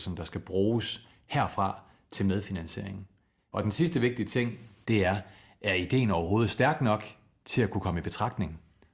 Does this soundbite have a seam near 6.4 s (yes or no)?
no